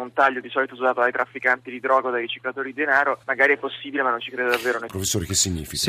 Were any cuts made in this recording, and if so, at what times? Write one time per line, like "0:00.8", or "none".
0:03.2
0:04.9